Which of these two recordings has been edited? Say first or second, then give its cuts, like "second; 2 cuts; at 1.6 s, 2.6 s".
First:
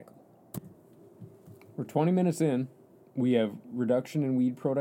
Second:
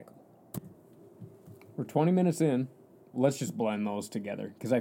second; 1 cut; at 3.1 s